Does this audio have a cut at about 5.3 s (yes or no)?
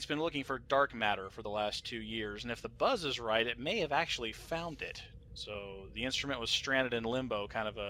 yes